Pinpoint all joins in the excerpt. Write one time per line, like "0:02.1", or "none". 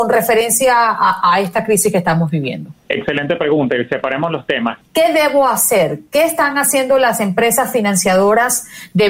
0:02.7
0:04.8